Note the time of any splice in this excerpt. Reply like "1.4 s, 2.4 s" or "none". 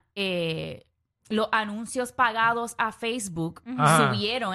none